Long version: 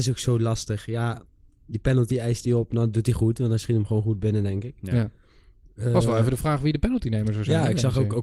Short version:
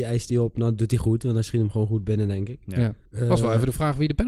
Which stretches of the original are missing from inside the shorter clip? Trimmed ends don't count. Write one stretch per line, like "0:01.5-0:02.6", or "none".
0:05.2-0:05.7